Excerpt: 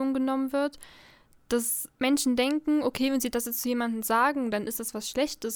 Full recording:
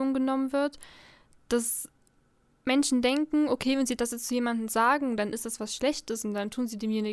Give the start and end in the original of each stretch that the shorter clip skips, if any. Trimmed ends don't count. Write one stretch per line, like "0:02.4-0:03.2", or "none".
0:01.9-0:02.6